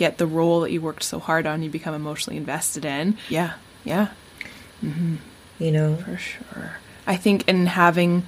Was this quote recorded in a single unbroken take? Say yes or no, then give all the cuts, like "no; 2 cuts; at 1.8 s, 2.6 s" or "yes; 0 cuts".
no; 1 cut; at 3.3 s